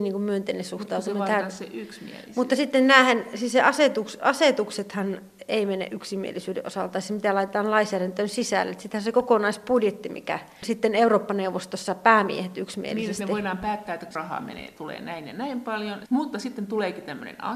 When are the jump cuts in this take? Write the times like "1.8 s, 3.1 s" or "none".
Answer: 16.1 s